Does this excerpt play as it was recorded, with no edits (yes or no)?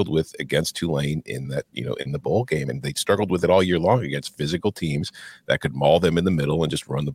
yes